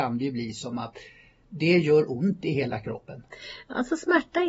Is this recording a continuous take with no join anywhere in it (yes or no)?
yes